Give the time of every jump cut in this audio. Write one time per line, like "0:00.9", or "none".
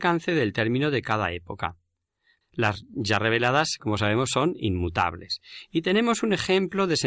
0:02.4

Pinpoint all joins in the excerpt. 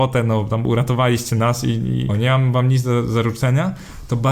0:02.1

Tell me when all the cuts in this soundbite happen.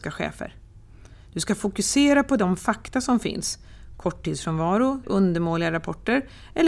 0:05.0

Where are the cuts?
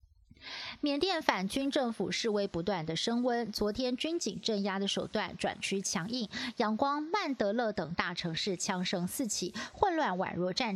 none

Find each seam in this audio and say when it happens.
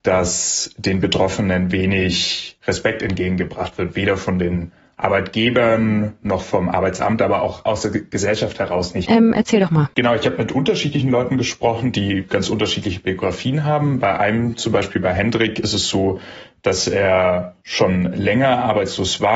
0:09.1

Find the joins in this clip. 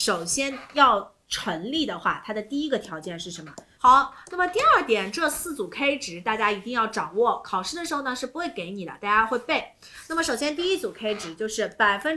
0:03.8

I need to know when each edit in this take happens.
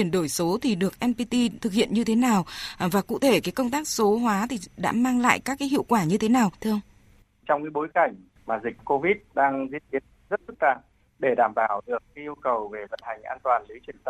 none

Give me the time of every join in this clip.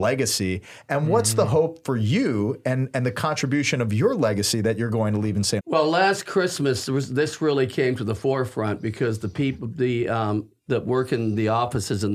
0:05.6
0:10.7

